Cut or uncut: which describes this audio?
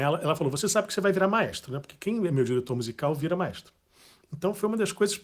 uncut